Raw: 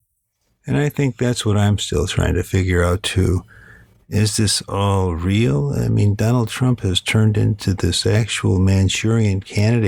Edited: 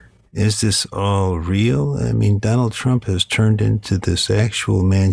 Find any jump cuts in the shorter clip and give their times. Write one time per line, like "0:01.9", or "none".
none